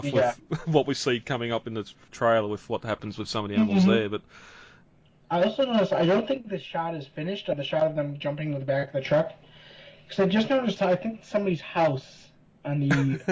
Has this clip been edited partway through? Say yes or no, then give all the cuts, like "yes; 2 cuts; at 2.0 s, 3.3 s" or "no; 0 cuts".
yes; 1 cut; at 10.8 s